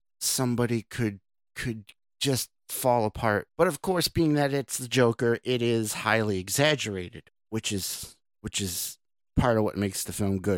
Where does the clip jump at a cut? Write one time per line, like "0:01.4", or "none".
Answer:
0:03.5